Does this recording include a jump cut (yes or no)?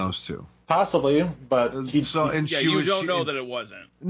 no